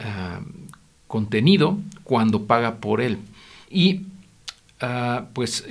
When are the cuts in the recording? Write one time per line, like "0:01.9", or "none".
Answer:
0:03.7